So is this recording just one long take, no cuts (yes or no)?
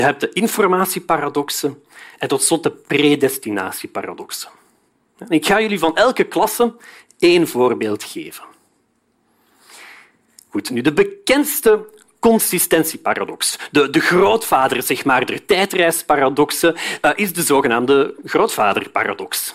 yes